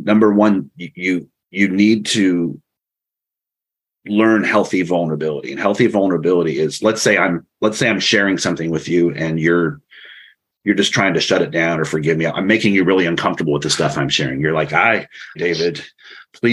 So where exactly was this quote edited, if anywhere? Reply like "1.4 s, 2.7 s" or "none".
15.4 s